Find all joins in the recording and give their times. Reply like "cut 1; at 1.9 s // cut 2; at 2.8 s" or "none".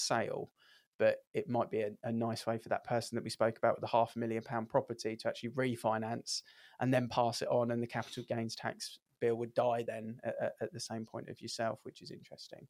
none